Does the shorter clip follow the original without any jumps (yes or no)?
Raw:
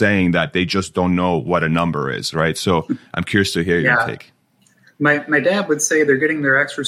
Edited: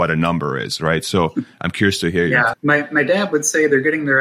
no